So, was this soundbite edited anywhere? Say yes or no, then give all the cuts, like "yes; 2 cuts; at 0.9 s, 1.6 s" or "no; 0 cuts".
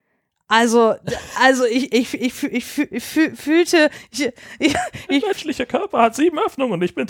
no; 0 cuts